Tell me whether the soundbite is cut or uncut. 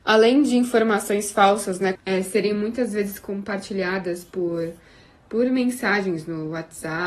cut